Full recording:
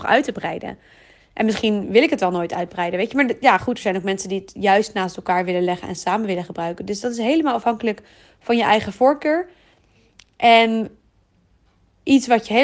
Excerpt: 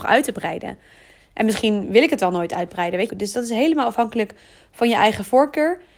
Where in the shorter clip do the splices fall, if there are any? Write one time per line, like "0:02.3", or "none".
0:03.1